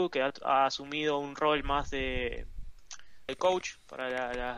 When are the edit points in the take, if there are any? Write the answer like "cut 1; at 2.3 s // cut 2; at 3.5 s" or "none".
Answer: cut 1; at 3.3 s